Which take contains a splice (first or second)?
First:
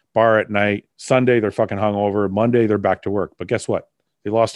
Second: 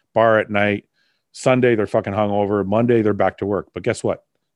first